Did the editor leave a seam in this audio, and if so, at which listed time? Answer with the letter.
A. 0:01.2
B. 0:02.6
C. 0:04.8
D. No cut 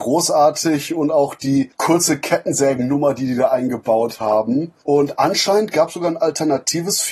D